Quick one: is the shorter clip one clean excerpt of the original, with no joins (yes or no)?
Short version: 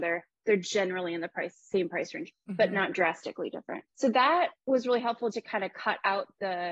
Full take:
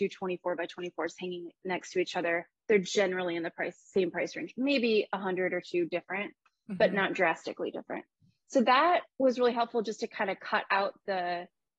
no